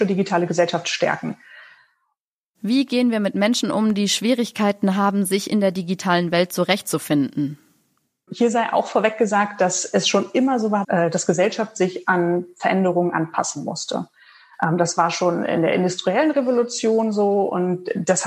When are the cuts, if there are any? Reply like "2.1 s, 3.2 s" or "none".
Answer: 10.8 s